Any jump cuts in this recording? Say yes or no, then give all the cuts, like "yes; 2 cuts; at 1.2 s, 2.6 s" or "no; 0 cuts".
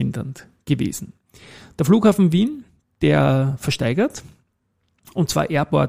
no; 0 cuts